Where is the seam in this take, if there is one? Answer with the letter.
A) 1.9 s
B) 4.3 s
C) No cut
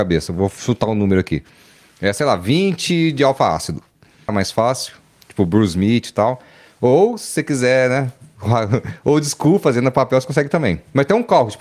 B